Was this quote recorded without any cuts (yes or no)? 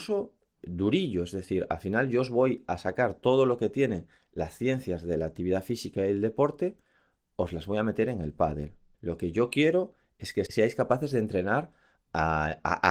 no